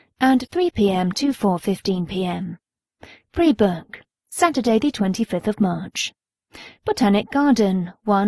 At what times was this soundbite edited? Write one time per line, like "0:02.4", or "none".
none